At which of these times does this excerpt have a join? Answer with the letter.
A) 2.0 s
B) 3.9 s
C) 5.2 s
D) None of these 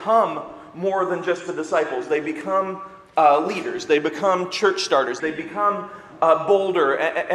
C